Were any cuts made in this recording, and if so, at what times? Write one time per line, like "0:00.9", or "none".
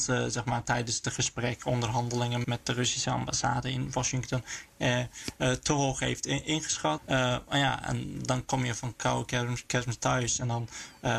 0:02.4
0:07.0